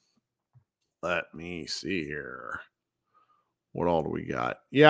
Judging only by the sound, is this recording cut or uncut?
uncut